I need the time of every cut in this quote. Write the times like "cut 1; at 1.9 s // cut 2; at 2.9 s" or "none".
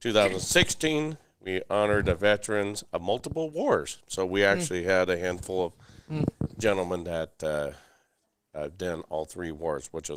none